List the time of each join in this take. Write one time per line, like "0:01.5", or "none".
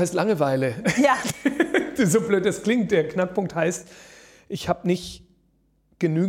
none